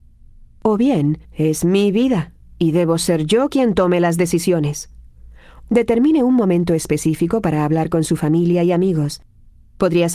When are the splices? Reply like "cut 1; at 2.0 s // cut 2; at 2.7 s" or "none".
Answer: cut 1; at 1.2 s